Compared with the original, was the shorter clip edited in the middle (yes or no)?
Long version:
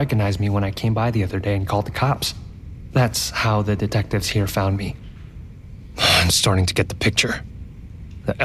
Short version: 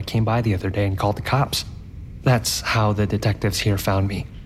no